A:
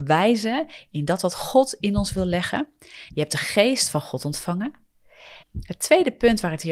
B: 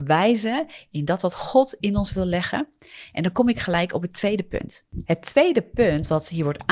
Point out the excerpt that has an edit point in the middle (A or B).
A